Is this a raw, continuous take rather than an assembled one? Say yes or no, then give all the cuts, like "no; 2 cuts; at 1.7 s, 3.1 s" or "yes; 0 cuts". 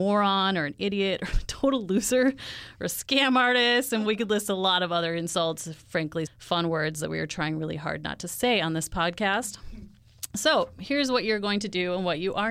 no; 2 cuts; at 4.1 s, 6.3 s